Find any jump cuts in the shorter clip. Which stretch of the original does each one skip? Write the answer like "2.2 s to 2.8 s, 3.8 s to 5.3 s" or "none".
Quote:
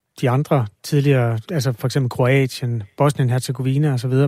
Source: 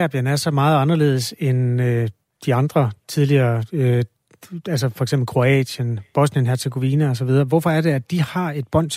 3.7 s to 4.6 s